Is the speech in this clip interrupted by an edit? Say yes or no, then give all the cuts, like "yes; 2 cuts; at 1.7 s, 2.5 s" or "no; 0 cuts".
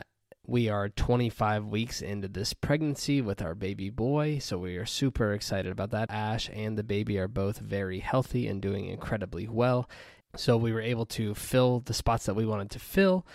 yes; 2 cuts; at 6.1 s, 10.2 s